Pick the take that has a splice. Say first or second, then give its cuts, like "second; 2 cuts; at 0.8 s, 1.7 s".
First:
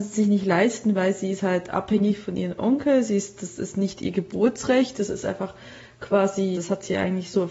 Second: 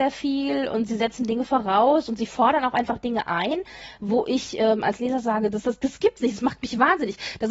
first; 1 cut; at 6.5 s